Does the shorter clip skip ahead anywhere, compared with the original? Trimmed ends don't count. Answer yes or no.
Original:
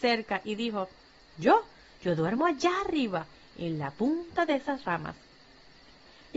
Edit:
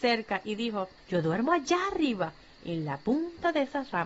yes